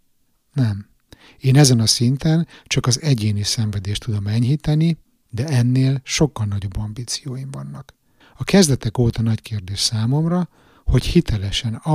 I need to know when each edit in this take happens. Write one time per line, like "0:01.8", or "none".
0:08.2